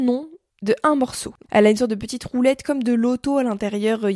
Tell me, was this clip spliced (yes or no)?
yes